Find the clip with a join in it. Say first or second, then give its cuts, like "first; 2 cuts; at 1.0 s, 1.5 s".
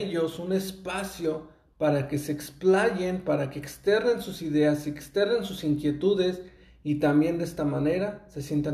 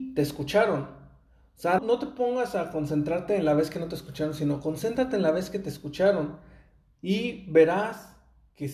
second; 1 cut; at 1.8 s